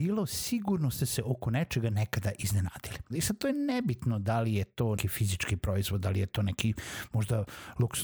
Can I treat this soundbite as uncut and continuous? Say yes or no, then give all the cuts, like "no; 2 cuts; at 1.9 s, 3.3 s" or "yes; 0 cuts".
no; 2 cuts; at 3.1 s, 5.0 s